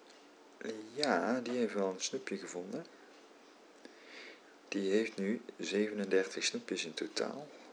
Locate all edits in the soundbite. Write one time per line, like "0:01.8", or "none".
none